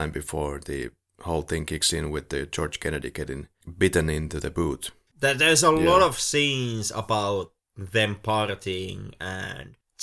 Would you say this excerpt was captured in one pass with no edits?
no; 1 cut; at 5.1 s

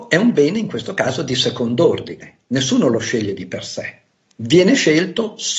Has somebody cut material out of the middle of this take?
no; 0 cuts

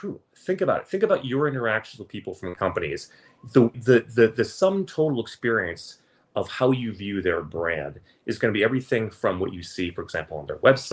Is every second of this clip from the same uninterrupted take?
no; 1 cut; at 3.7 s

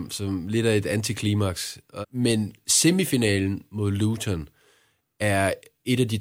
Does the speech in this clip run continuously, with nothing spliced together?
no; 1 cut; at 2.0 s

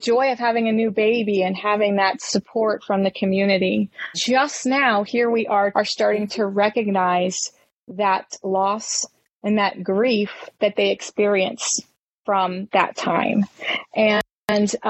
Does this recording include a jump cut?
yes; 3 cuts; at 4.1 s, 5.7 s, 10.5 s

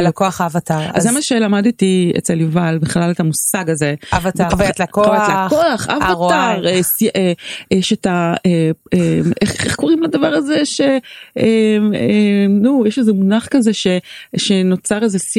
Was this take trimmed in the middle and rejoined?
yes; 1 cut; at 4.5 s

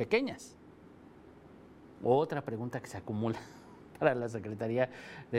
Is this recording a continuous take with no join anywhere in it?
no; 1 cut; at 2.0 s

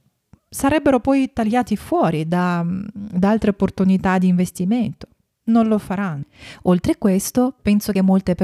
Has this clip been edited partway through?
no; 0 cuts

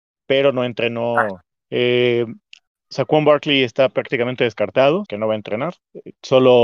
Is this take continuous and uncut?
no; 2 cuts; at 1.6 s, 5.1 s

